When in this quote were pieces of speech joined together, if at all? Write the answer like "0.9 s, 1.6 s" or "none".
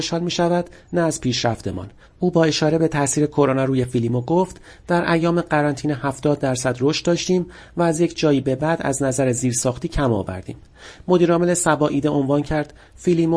none